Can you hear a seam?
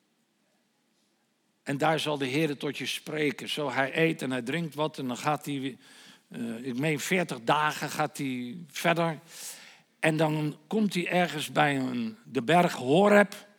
no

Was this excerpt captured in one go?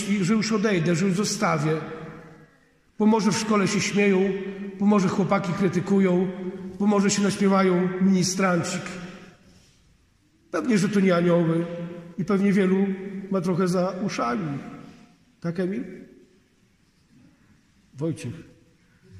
yes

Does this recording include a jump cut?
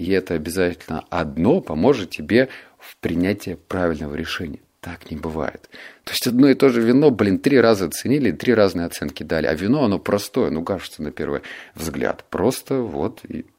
no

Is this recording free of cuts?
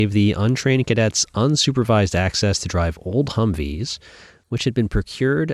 yes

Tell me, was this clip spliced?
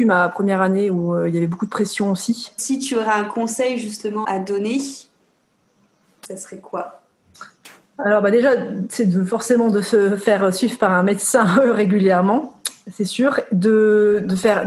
yes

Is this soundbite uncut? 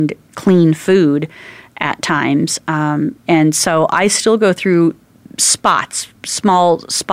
no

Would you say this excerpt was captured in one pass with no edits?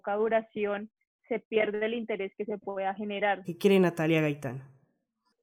no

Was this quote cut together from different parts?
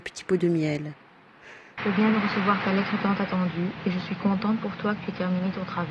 yes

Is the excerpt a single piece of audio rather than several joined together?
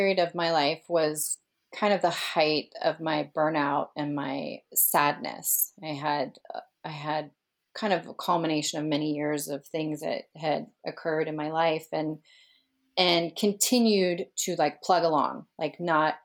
yes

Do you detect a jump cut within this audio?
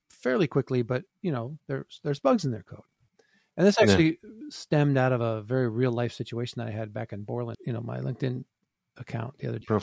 yes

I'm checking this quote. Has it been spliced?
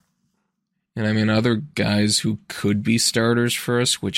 no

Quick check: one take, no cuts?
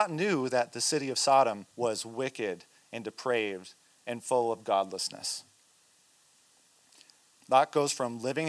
no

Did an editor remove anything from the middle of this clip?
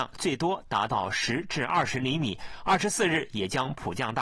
no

